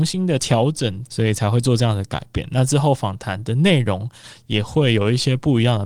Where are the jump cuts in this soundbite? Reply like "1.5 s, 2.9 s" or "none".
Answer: 1.1 s